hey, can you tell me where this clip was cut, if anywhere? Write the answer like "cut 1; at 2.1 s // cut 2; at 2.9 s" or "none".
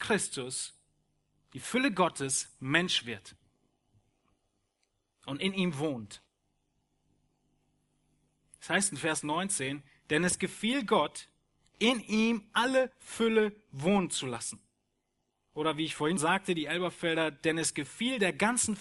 cut 1; at 16.2 s